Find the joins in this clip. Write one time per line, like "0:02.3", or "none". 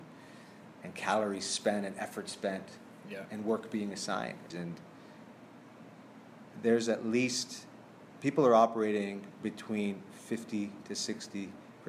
0:04.5